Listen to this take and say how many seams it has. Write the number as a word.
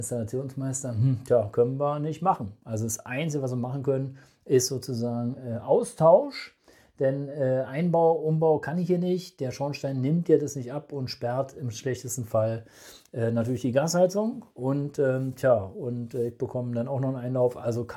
zero